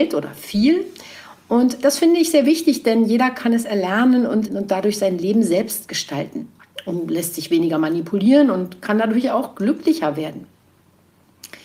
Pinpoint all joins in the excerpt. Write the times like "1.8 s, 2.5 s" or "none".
4.5 s